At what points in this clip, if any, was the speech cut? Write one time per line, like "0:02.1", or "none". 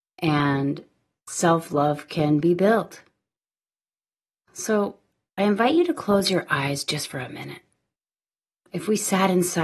0:08.6